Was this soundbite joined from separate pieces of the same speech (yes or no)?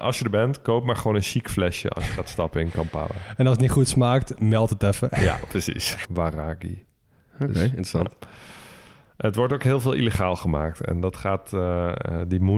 yes